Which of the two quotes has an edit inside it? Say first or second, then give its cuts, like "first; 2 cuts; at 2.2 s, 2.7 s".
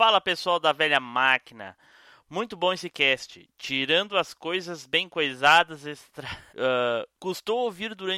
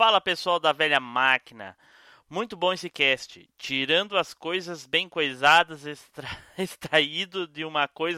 first; 1 cut; at 6.5 s